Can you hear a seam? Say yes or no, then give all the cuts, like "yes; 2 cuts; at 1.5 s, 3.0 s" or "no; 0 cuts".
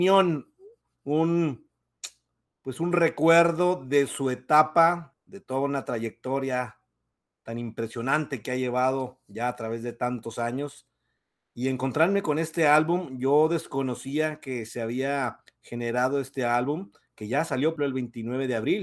yes; 2 cuts; at 5.1 s, 17.8 s